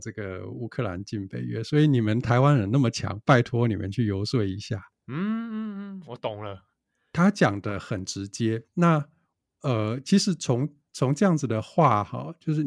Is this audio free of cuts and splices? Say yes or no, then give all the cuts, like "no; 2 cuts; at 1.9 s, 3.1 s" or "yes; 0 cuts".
yes; 0 cuts